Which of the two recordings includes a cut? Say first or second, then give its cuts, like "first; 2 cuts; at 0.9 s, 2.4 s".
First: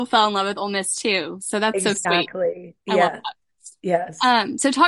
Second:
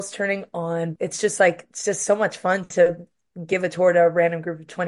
second; 1 cut; at 1.0 s